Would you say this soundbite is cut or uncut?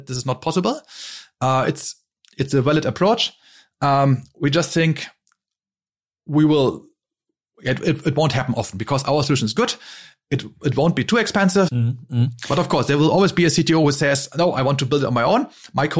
cut